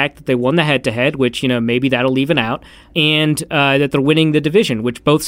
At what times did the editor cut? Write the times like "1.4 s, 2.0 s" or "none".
2.9 s